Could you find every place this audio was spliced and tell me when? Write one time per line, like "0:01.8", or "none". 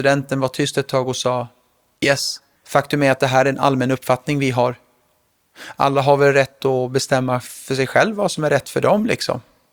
0:02.6